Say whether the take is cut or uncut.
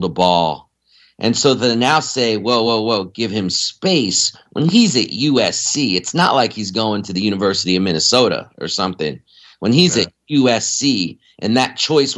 uncut